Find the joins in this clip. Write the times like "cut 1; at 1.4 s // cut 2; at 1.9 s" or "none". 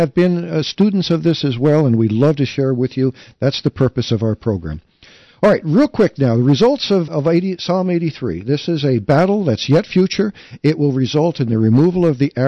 cut 1; at 7.1 s